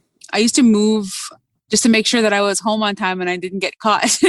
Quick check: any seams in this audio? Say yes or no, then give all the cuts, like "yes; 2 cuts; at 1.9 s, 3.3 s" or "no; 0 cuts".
yes; 1 cut; at 1.7 s